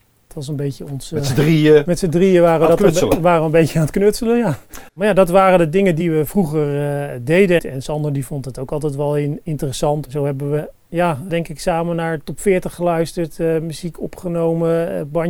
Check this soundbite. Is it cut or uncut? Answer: cut